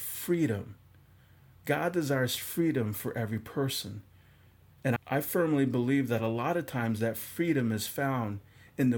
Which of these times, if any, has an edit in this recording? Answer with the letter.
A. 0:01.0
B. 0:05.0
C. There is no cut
B